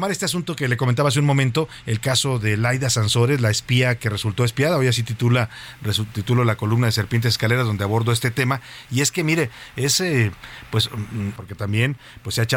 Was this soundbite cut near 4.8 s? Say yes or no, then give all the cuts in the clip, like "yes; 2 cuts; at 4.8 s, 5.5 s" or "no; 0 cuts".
no; 1 cut; at 11.4 s